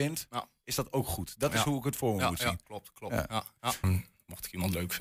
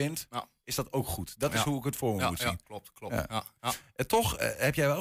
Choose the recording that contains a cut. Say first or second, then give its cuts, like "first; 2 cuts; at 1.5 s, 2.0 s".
first; 1 cut; at 3.8 s